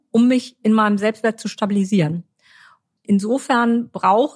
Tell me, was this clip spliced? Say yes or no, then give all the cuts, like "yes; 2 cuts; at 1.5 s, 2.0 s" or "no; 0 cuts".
no; 0 cuts